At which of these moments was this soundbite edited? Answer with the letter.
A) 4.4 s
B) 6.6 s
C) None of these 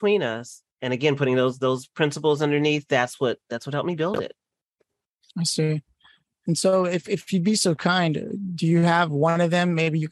C